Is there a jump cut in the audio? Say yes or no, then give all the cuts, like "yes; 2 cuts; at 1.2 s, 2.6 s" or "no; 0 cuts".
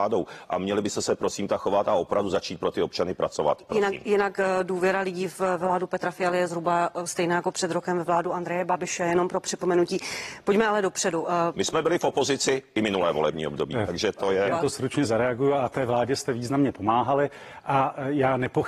yes; 1 cut; at 14.5 s